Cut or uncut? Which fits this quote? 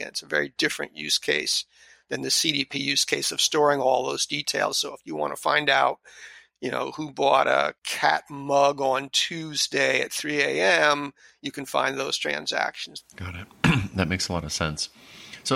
cut